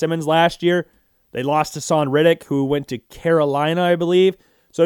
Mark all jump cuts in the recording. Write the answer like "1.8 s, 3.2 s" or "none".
none